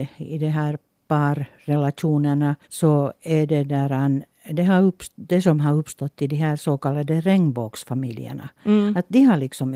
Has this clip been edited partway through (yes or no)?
yes